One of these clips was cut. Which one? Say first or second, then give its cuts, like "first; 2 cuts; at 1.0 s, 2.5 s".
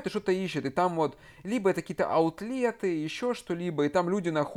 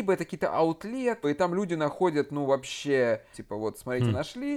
second; 2 cuts; at 1.2 s, 3.3 s